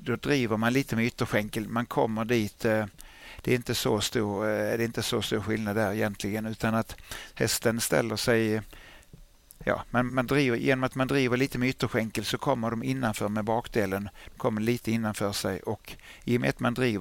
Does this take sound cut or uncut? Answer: cut